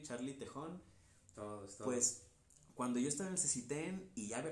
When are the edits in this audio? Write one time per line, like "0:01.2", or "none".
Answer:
0:01.3